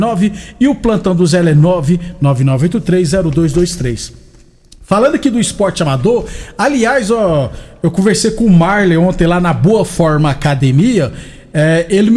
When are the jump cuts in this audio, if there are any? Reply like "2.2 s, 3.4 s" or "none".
none